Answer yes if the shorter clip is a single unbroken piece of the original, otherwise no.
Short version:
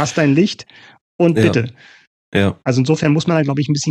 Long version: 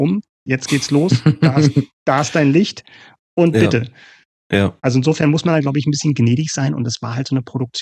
yes